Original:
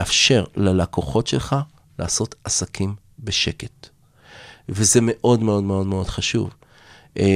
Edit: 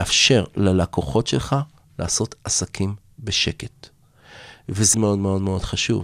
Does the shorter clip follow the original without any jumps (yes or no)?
no